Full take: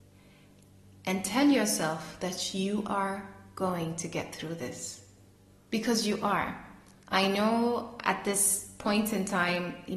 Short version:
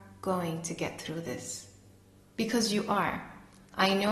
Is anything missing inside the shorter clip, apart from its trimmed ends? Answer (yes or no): no